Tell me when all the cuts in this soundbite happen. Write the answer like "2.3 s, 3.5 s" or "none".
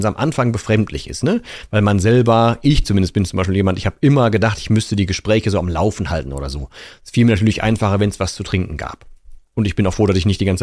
9.4 s